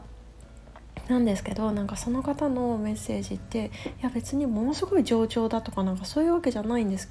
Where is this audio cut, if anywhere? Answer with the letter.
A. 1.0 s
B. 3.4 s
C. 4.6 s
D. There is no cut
A